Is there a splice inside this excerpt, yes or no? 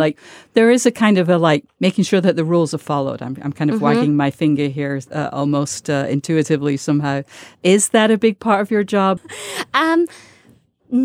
yes